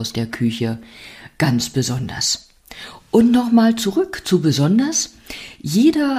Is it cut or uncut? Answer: uncut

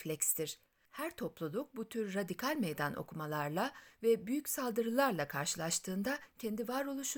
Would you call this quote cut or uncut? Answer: uncut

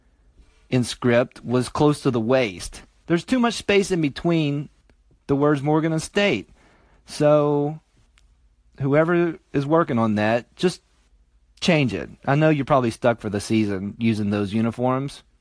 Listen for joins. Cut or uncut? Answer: uncut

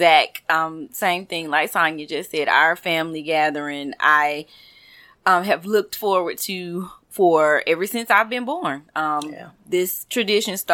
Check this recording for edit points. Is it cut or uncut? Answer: uncut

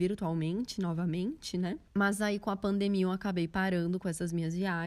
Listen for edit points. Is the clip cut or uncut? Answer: cut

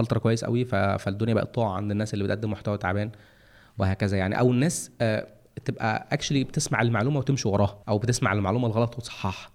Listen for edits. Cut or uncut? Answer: cut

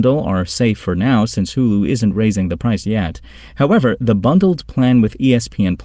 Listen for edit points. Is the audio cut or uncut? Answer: cut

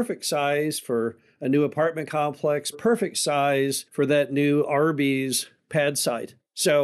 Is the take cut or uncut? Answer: cut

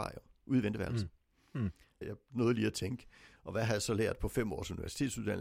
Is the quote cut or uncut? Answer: cut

